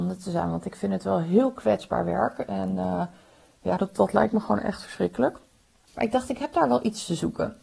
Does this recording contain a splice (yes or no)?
yes